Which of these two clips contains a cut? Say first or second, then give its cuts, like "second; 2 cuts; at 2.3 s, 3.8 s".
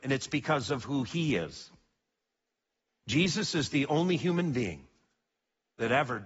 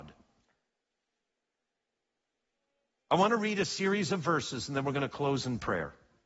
first; 1 cut; at 2.9 s